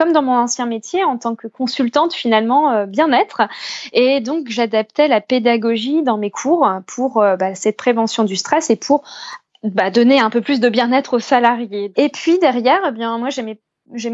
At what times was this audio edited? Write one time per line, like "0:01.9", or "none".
0:11.9